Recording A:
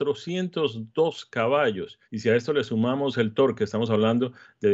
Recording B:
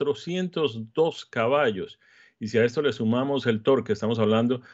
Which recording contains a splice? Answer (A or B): A